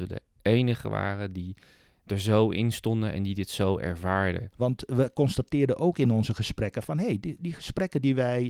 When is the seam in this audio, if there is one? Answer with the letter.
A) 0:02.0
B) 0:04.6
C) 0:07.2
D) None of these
B